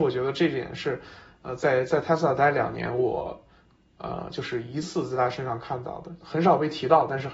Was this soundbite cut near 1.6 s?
no; 1 cut; at 4.8 s

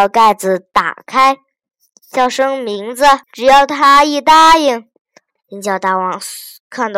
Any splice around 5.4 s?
yes; 2 cuts; at 3.2 s, 5.4 s

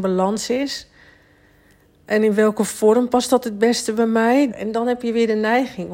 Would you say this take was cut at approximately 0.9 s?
no; 1 cut; at 4.5 s

